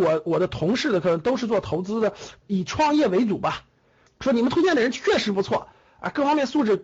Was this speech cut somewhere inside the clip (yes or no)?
yes